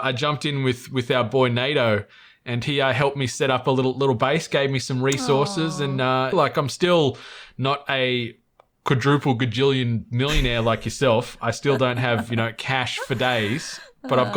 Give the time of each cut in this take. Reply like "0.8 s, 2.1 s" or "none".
6.3 s